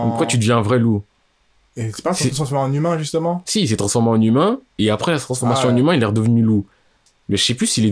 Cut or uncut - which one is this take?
uncut